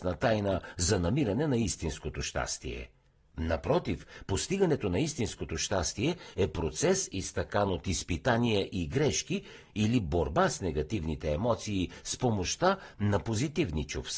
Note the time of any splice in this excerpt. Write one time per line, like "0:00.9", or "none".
0:09.6